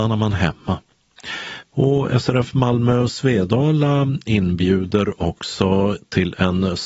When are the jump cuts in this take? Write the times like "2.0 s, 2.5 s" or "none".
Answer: 1.6 s